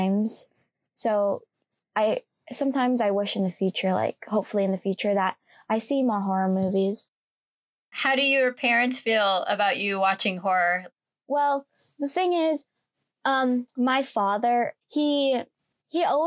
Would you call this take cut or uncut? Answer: uncut